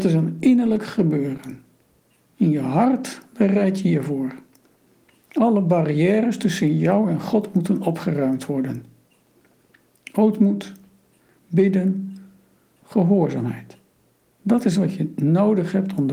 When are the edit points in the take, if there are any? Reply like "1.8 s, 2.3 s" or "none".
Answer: 12.8 s